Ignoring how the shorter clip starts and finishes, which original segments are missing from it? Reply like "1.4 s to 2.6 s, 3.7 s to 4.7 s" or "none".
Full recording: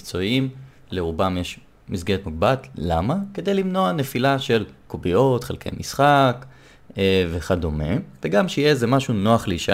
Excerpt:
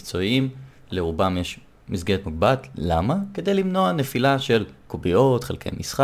none